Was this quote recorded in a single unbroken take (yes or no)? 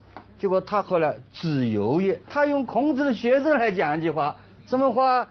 no